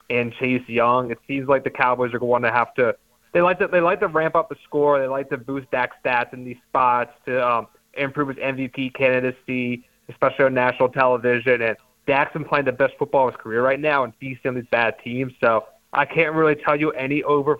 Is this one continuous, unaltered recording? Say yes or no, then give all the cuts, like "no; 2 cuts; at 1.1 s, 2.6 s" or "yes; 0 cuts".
yes; 0 cuts